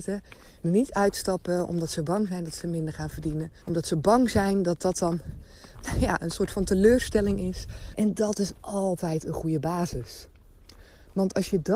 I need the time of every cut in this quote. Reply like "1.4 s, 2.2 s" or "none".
3.6 s, 7.9 s